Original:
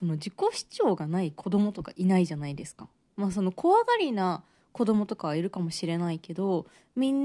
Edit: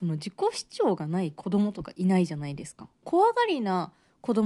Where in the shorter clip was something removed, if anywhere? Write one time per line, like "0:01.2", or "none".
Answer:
0:03.0